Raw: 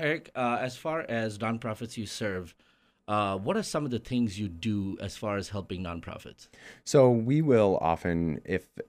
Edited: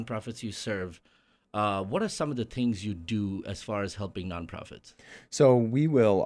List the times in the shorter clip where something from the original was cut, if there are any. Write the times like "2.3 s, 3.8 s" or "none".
none